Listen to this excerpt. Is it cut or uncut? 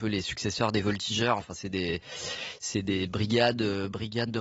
uncut